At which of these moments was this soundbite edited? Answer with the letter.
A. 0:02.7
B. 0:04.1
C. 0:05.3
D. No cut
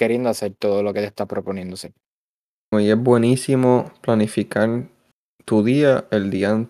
A